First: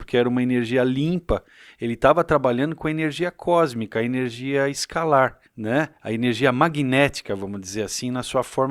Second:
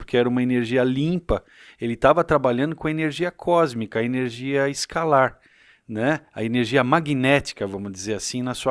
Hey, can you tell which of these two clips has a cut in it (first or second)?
first